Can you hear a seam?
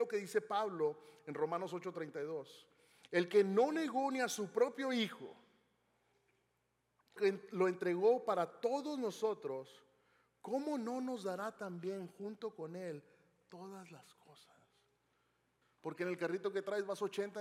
yes; 2 cuts; at 7.2 s, 15.6 s

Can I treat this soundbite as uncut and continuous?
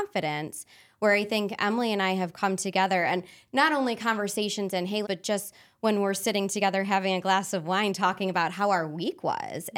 no; 1 cut; at 5.0 s

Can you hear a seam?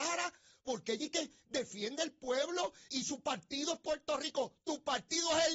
yes; 1 cut; at 2.9 s

